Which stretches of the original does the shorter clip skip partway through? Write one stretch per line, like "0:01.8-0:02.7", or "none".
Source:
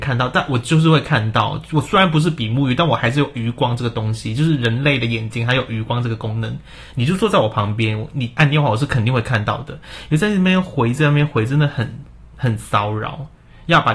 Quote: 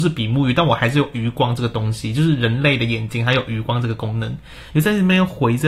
0:06.9-0:10.1